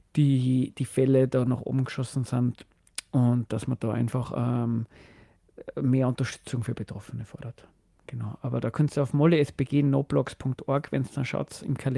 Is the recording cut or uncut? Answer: uncut